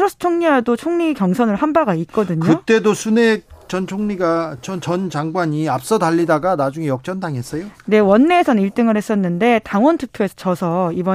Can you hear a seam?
no; 0 cuts

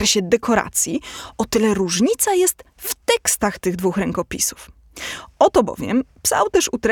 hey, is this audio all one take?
yes; 0 cuts

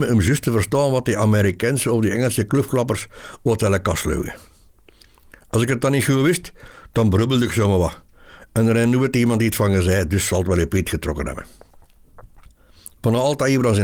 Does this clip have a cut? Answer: yes; 1 cut; at 12.5 s

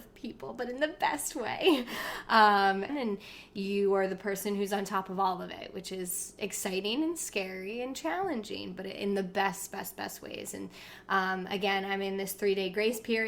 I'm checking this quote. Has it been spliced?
yes; 1 cut; at 2.9 s

